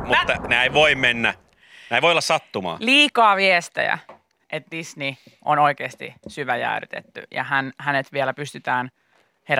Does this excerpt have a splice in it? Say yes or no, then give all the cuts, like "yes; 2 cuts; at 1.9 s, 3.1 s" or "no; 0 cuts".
yes; 1 cut; at 4.4 s